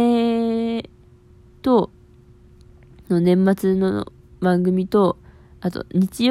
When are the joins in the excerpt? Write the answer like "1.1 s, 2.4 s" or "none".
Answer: none